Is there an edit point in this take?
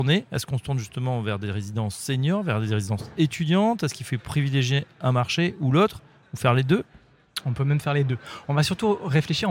no; 0 cuts

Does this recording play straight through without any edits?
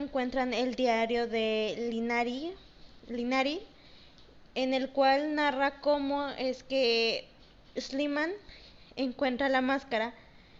yes; 0 cuts

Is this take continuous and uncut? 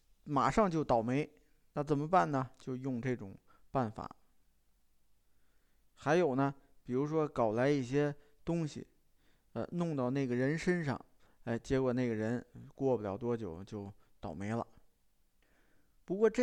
yes; 0 cuts

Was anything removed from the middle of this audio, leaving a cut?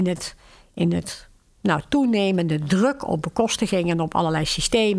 no; 0 cuts

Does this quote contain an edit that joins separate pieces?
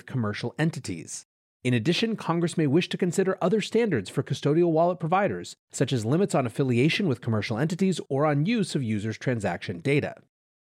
yes; 1 cut; at 1.5 s

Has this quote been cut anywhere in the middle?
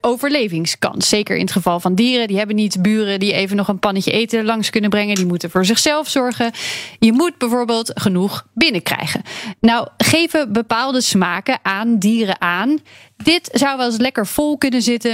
no; 0 cuts

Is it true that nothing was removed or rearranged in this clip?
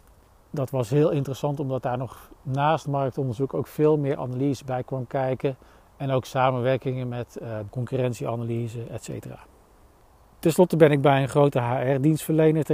no; 1 cut; at 7.7 s

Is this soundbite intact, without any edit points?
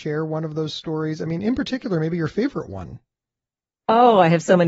yes; 0 cuts

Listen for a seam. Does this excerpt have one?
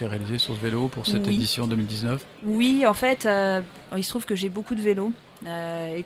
no; 0 cuts

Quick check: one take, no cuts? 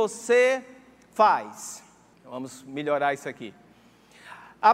no; 1 cut; at 2.1 s

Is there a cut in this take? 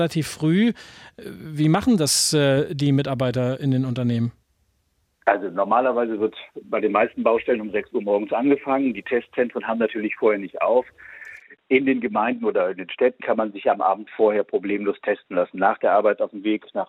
yes; 1 cut; at 13.2 s

